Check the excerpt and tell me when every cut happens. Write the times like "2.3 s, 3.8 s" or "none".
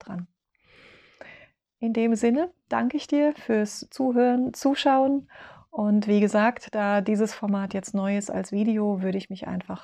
none

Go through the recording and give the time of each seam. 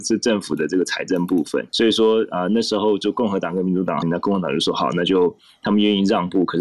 1.7 s, 4.0 s

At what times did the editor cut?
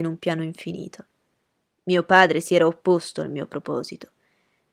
1.6 s

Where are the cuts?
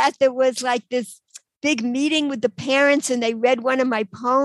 none

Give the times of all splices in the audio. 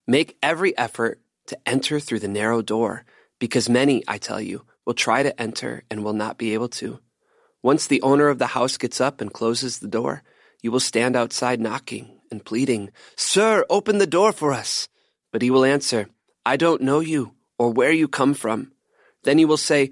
none

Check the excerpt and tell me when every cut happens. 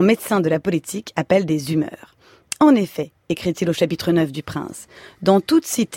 none

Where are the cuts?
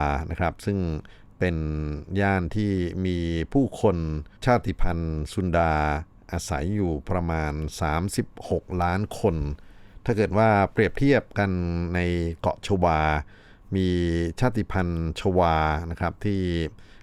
4.4 s

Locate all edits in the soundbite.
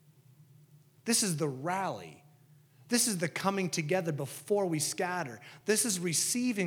none

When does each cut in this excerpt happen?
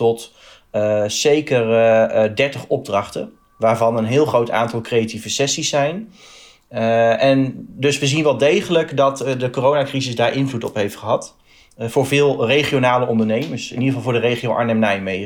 none

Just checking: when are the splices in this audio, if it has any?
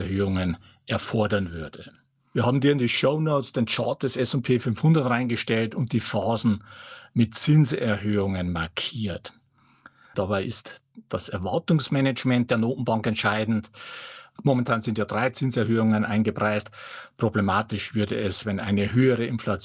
10.1 s

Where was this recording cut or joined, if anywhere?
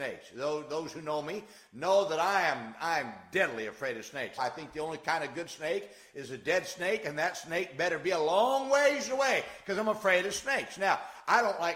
4.4 s

